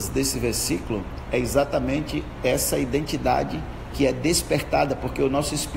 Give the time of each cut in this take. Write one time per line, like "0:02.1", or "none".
none